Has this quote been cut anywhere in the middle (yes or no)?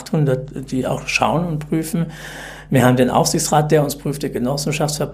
no